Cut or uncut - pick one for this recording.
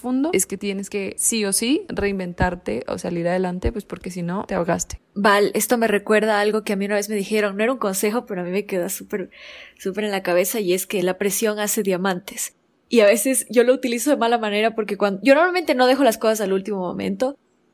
cut